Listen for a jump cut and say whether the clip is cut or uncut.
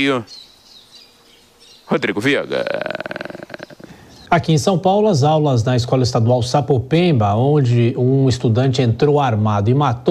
uncut